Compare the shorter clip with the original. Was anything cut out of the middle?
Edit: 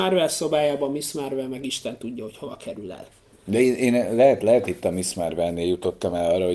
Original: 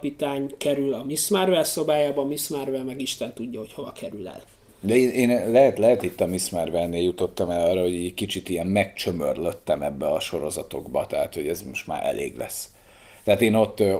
no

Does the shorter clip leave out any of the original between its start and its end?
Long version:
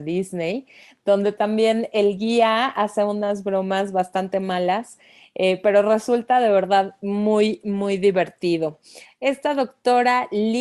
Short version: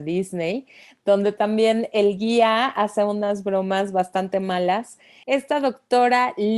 yes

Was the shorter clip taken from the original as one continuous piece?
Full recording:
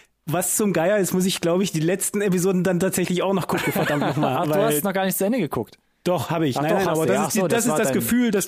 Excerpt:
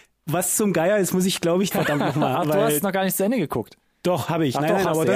no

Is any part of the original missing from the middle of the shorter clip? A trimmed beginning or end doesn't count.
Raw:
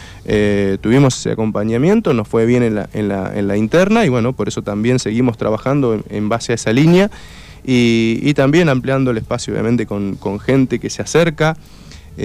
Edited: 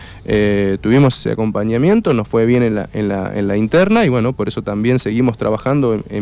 no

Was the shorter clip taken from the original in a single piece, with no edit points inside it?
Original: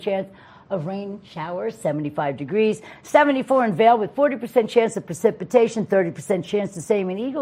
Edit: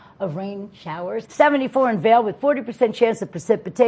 no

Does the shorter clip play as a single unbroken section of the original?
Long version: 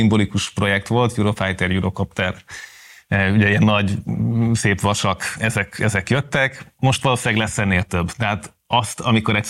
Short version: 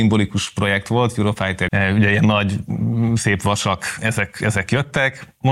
no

